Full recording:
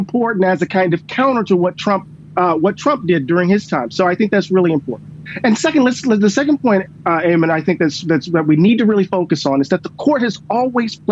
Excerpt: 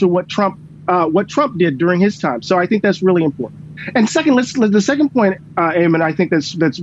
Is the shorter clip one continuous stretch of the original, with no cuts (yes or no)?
yes